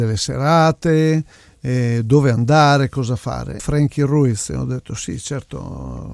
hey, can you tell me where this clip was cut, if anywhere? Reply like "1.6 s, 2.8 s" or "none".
3.6 s